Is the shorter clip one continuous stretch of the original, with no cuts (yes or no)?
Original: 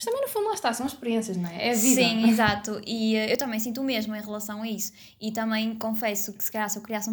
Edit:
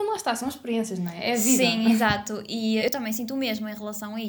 no